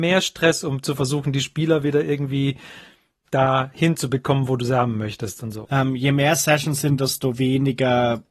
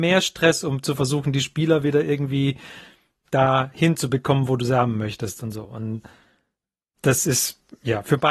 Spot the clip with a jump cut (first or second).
first